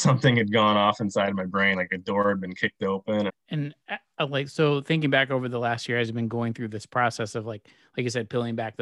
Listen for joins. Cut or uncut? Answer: cut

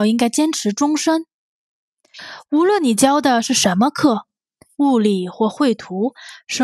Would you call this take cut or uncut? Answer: cut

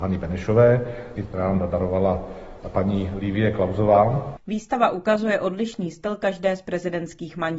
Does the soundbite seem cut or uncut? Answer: cut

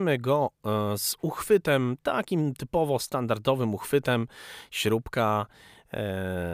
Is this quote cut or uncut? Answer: uncut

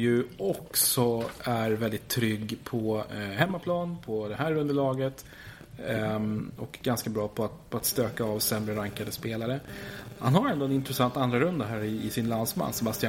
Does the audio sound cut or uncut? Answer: uncut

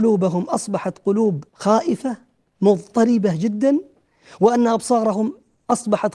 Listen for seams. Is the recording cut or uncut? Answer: cut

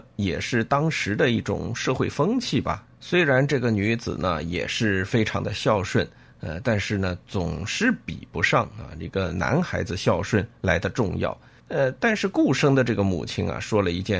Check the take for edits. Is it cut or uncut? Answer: cut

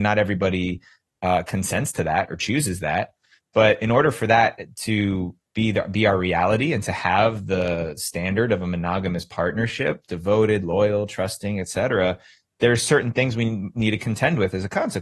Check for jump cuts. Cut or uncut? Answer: uncut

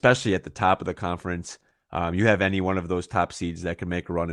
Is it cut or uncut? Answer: uncut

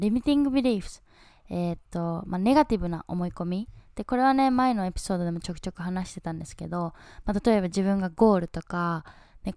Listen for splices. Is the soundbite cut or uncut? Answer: uncut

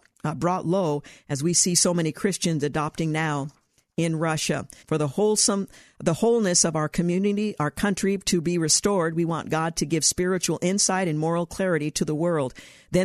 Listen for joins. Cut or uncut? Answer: cut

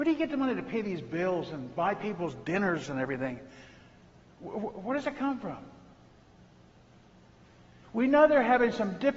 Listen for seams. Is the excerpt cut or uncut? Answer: cut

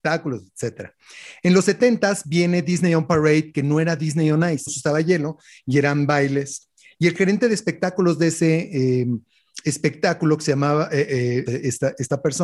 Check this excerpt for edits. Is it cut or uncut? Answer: cut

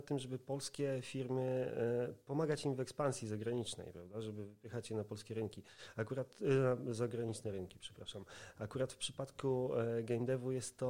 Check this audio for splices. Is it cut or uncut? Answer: uncut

